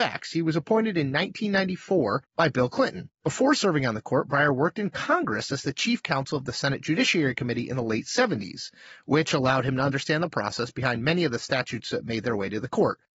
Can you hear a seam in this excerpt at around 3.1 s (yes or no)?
no